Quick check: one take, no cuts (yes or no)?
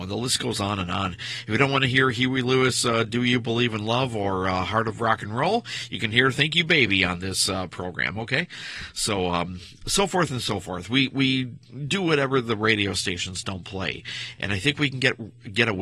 yes